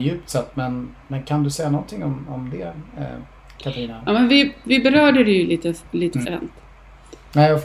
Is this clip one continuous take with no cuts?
no; 1 cut; at 6.3 s

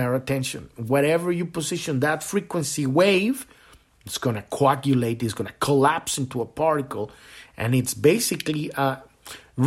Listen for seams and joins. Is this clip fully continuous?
yes; 0 cuts

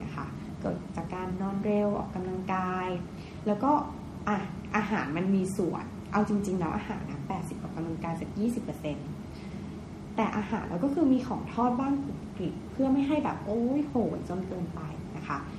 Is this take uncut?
no; 1 cut; at 7.6 s

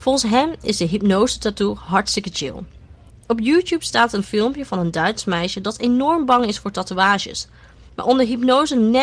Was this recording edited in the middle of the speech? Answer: yes; 1 cut; at 3.1 s

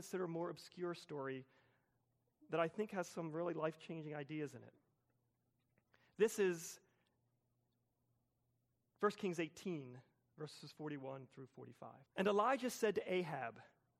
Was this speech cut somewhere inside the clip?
yes; 1 cut; at 12.1 s

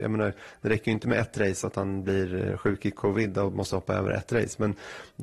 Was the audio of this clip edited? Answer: no; 0 cuts

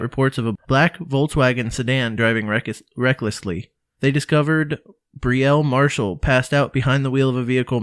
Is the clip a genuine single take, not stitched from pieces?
yes; 0 cuts

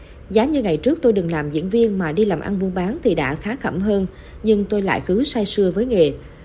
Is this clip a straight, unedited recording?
yes; 0 cuts

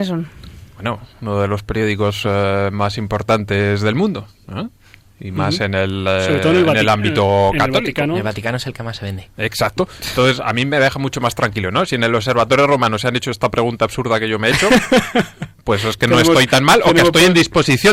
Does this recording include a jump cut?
no; 0 cuts

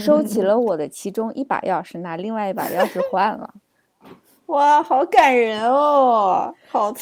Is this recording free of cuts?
yes; 0 cuts

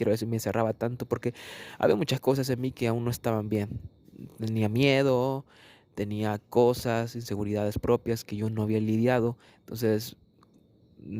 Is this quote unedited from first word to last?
yes; 0 cuts

